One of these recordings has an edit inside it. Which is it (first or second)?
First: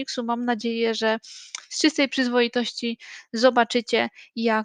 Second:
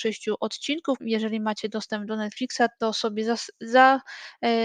second